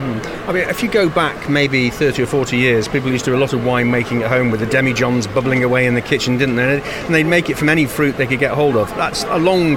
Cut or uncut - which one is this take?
uncut